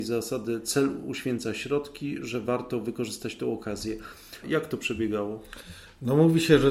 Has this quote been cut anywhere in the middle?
yes; 1 cut; at 4.4 s

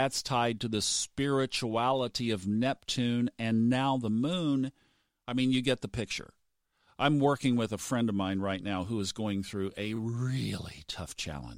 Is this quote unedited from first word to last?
yes; 0 cuts

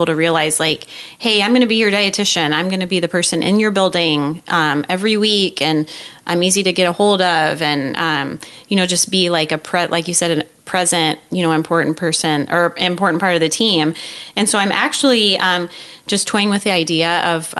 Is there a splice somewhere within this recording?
no; 0 cuts

